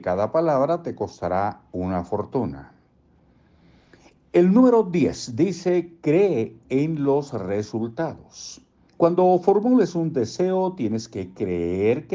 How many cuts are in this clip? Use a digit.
1